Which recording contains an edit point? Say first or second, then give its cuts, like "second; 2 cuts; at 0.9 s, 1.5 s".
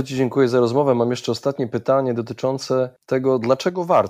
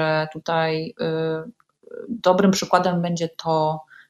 first; 1 cut; at 3.0 s